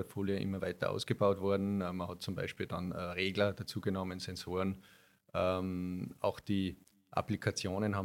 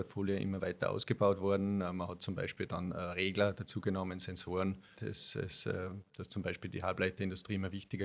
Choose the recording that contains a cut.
second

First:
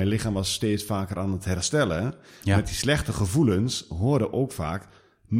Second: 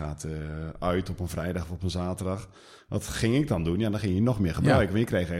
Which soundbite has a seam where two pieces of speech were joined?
second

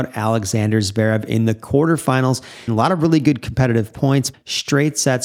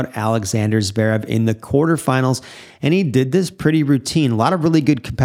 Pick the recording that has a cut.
first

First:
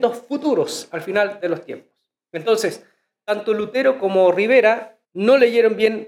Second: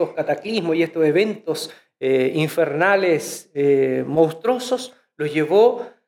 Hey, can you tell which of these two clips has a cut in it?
first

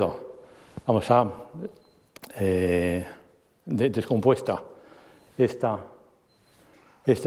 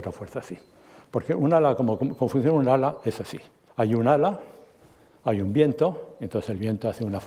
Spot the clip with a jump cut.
second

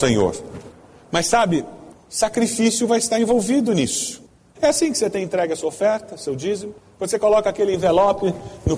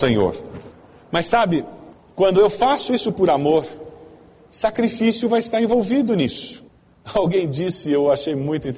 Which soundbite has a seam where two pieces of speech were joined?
first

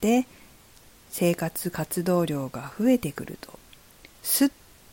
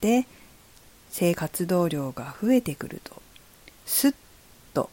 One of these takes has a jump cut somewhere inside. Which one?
second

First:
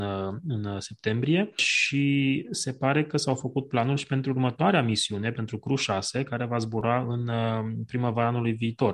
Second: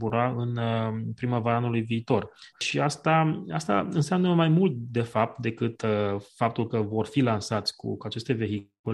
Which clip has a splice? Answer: second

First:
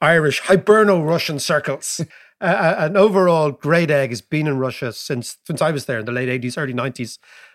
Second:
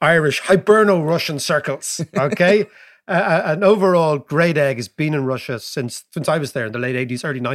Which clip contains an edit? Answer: first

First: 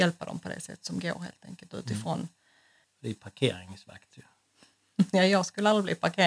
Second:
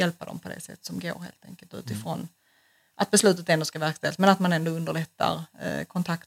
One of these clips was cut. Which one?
first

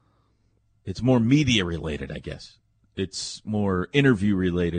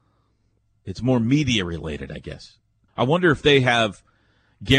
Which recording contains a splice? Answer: second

